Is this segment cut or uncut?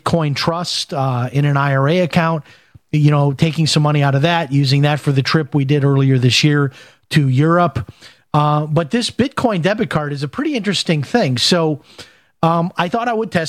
uncut